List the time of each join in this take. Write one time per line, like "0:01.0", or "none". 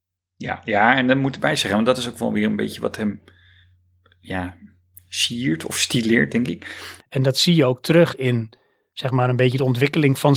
0:07.0